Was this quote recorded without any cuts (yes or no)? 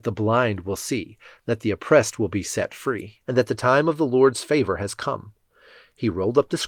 no